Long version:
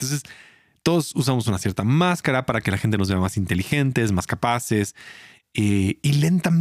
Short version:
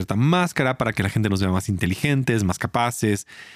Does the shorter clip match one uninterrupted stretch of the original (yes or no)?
yes